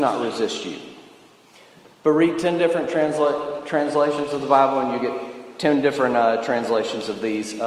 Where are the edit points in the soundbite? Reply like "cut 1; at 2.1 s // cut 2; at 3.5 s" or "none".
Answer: none